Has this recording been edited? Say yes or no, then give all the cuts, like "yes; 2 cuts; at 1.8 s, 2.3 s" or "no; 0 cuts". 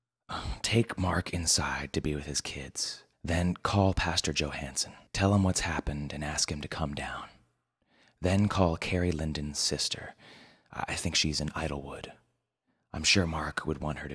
yes; 2 cuts; at 3.1 s, 5.1 s